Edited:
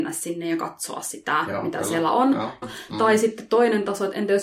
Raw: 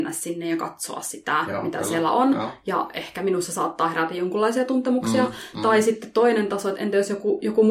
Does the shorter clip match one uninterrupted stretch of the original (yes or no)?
no